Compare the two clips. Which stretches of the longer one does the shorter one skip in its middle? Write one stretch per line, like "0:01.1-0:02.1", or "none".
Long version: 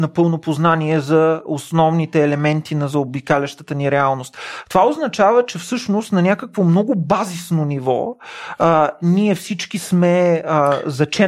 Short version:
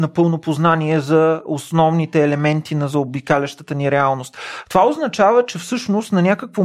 none